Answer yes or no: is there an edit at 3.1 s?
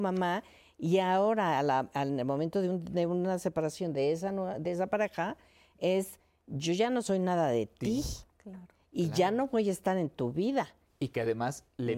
no